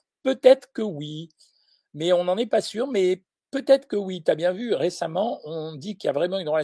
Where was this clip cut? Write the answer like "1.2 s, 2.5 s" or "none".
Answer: none